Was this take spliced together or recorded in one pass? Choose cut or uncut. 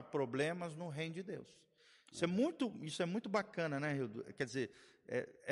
uncut